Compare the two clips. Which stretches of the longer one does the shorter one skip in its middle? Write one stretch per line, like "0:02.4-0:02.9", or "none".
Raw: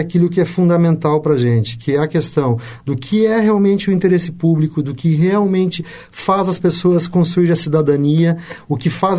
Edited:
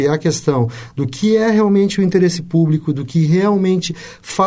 none